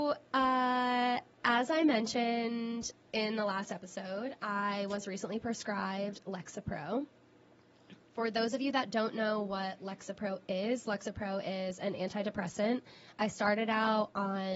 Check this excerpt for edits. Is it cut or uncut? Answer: uncut